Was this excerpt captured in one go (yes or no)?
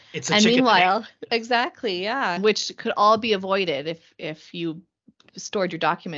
no